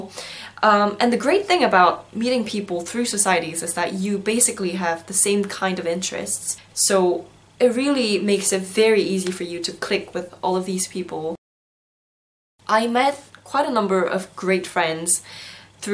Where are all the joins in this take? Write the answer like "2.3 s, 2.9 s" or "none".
6.7 s

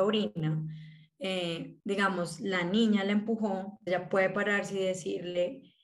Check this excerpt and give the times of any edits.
1.8 s, 3.9 s

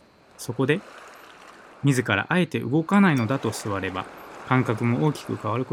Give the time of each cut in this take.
none

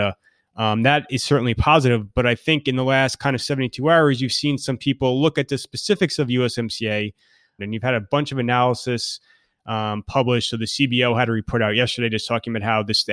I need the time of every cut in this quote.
7.6 s

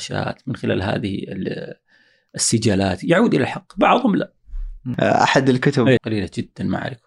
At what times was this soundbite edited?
6.0 s

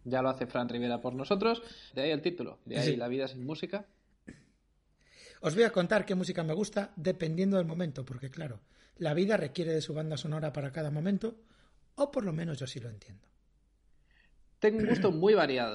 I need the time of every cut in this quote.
1.9 s

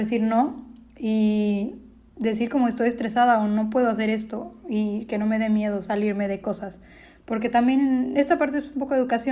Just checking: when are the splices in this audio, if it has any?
none

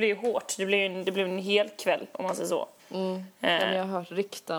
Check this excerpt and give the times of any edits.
2.8 s

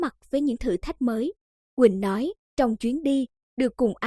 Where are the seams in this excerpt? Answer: 1.5 s

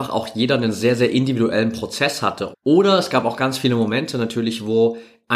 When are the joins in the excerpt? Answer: 2.5 s

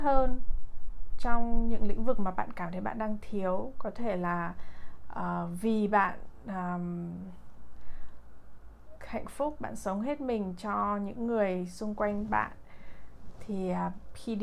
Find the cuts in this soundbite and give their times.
none

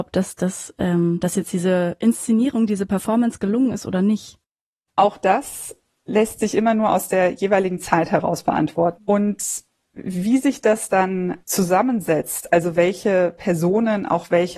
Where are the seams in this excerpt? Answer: 9.0 s, 11.4 s

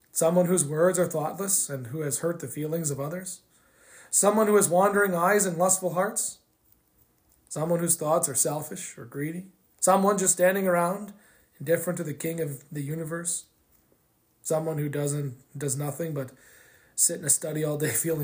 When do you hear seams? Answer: none

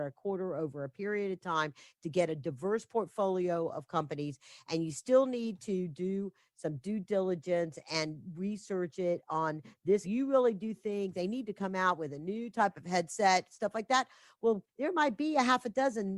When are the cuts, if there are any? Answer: 10.0 s, 14.7 s

